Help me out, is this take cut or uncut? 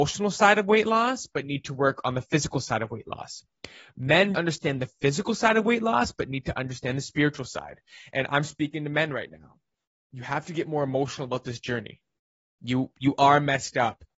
cut